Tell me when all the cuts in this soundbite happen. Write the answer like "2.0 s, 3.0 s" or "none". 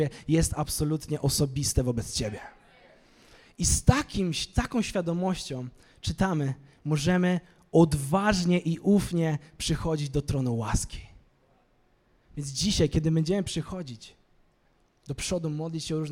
none

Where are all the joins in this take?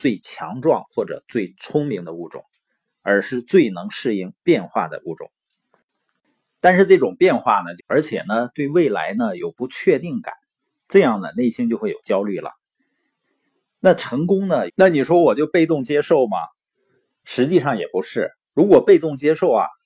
7.8 s, 14.7 s

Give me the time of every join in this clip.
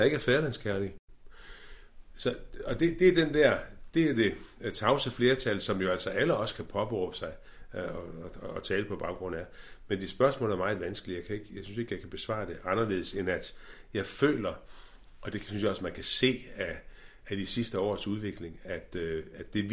2.1 s

